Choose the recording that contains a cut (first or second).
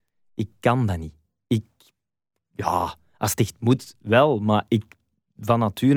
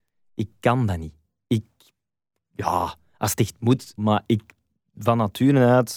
second